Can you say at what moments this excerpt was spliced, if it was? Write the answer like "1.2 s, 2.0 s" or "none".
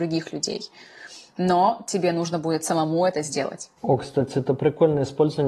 none